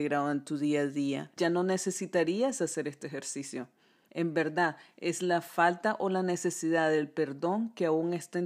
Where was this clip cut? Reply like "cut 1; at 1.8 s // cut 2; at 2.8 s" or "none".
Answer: cut 1; at 1.4 s // cut 2; at 4.1 s